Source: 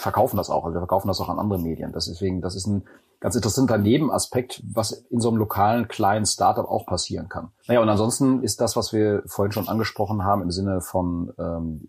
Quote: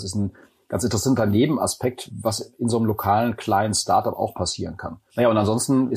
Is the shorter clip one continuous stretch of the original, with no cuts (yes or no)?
yes